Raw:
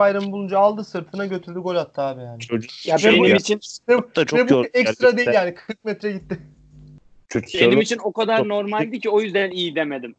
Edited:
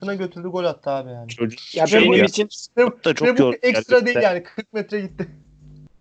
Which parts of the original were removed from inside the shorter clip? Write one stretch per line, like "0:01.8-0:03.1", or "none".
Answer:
none